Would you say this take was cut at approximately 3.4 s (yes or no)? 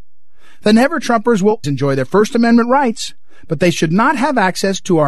no